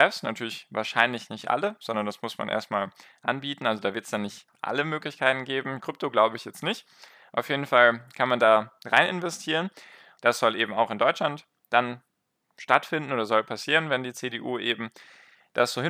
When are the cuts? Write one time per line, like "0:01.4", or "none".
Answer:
0:05.8
0:10.2